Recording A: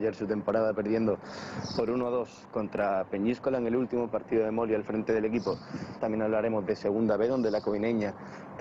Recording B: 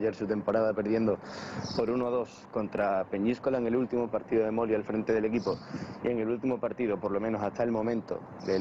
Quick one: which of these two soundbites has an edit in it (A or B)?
A